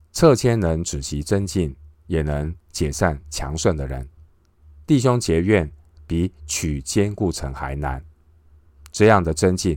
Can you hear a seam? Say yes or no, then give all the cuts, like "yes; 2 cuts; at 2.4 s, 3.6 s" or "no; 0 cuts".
yes; 1 cut; at 5.9 s